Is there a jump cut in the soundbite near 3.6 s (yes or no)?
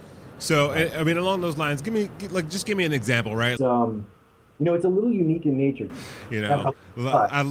yes